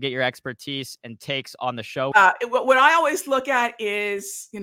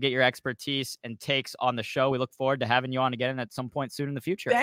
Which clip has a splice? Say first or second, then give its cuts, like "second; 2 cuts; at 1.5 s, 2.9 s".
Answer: first; 1 cut; at 2.1 s